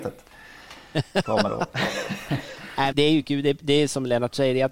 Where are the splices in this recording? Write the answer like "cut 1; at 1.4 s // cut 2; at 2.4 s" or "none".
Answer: cut 1; at 2.9 s